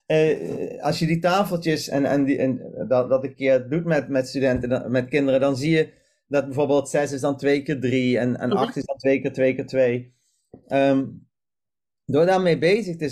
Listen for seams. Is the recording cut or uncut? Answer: uncut